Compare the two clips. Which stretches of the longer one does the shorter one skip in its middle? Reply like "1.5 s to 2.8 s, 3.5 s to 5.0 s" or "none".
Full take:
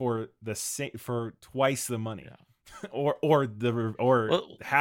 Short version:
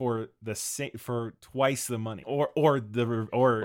2.2 s to 2.9 s